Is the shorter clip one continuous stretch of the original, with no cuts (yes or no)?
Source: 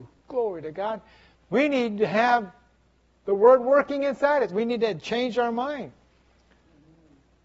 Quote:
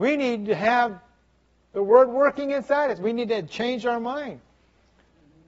yes